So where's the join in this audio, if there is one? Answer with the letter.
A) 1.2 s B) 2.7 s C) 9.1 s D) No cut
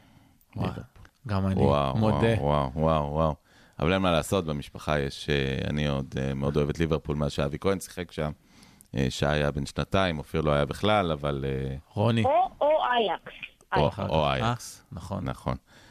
D